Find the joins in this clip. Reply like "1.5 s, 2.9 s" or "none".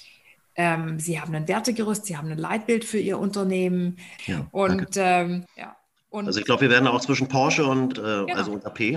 4.2 s, 5.5 s, 7.9 s